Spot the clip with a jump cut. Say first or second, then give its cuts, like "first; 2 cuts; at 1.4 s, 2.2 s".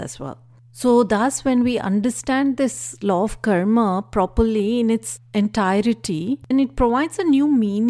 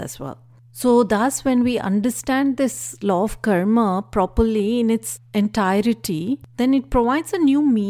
first; 1 cut; at 6.5 s